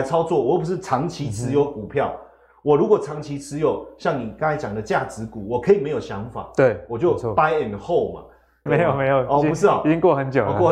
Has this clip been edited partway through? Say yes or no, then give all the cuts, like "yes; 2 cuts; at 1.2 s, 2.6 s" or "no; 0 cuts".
yes; 1 cut; at 8.7 s